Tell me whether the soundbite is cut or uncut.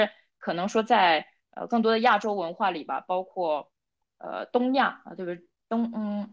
uncut